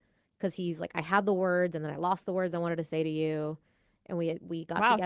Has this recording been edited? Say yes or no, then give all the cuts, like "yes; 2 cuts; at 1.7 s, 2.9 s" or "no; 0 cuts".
no; 0 cuts